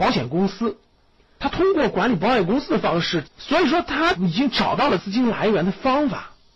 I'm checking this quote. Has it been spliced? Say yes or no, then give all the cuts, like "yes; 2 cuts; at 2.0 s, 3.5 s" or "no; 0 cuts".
yes; 1 cut; at 3.2 s